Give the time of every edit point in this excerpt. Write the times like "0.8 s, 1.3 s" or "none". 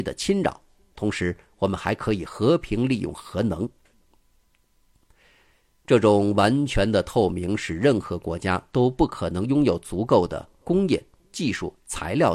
none